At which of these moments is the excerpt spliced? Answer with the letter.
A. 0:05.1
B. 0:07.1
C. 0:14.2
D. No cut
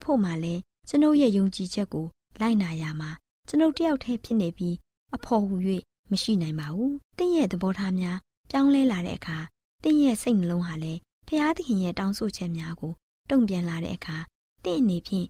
B